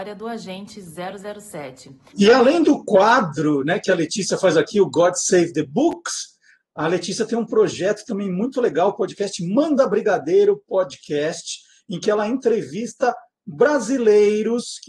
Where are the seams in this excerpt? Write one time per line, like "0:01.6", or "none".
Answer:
0:02.1

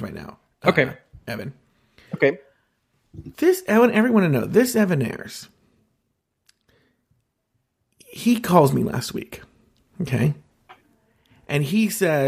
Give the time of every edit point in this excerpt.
none

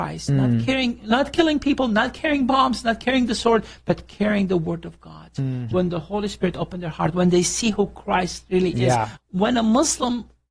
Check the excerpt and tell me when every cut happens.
0:05.7
0:09.2

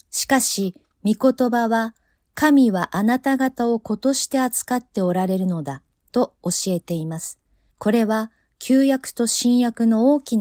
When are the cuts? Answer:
0:07.7

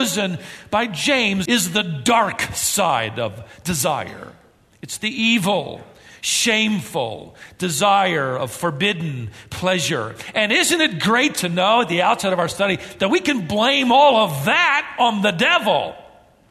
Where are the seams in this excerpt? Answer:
0:01.5

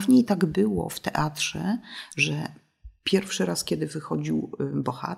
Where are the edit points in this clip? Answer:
none

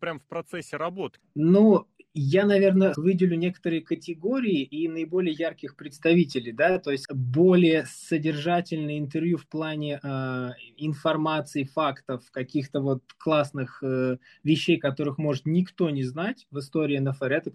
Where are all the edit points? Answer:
0:01.2
0:02.9
0:07.0

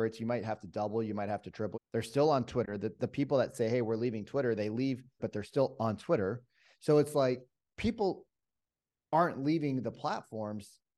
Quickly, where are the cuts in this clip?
0:01.7
0:05.2

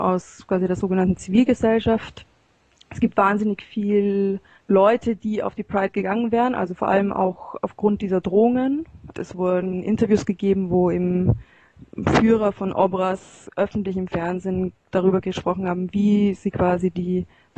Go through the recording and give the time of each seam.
0:09.1

